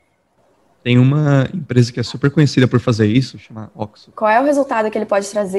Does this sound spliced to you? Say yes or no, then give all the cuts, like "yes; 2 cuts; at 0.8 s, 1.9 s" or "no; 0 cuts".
yes; 1 cut; at 4.1 s